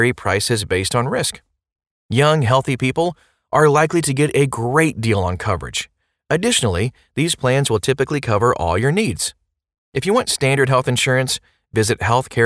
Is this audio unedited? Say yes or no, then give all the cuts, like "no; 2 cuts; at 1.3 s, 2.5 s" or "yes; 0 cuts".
yes; 0 cuts